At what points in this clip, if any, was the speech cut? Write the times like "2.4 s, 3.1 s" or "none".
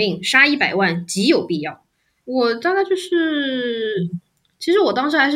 2.2 s